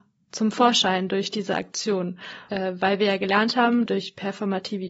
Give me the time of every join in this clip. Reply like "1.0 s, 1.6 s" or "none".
2.5 s, 3.9 s

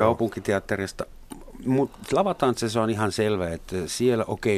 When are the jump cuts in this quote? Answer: none

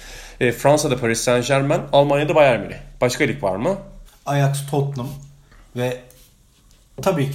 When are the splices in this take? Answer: 4.0 s

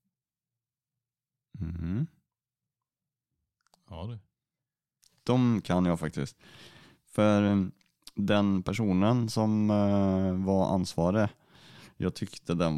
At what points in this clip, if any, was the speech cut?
none

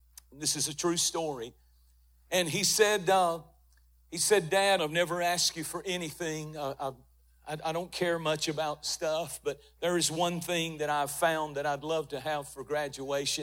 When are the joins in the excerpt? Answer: 4.8 s

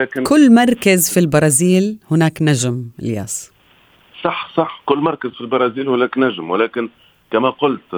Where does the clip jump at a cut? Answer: none

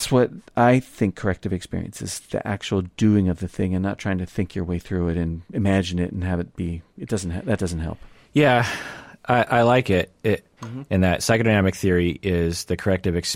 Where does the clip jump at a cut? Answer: 2.0 s, 10.6 s

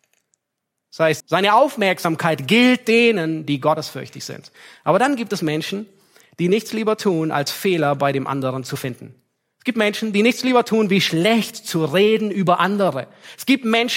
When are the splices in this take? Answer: 1.2 s

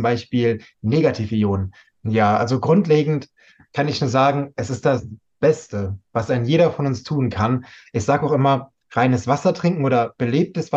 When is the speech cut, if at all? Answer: 1.9 s

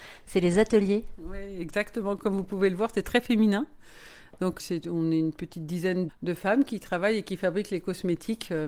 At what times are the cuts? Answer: 4.6 s, 6.1 s

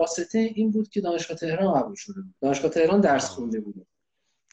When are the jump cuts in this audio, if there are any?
2.4 s

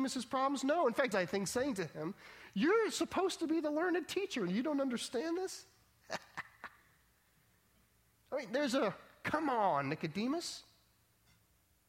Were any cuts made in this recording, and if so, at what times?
1.1 s

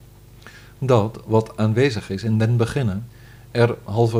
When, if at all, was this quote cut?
none

